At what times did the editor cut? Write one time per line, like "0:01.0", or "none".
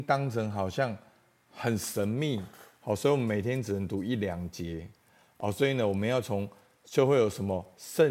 none